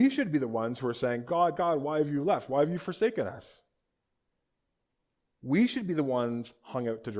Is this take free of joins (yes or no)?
yes